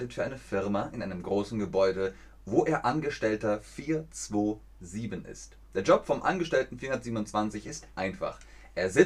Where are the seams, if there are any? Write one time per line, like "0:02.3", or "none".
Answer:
none